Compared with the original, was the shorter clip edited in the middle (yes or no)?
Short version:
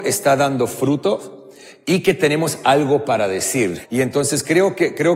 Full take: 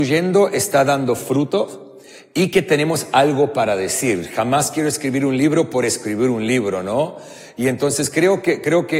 yes